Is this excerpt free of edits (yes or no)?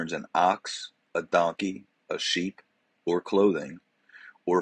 yes